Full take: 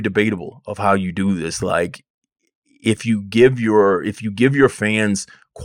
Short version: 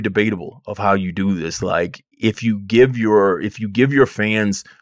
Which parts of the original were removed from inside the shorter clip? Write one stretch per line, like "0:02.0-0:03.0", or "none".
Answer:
0:02.1-0:02.7